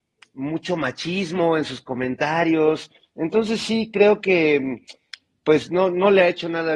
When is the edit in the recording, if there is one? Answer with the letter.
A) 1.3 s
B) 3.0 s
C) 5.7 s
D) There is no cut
D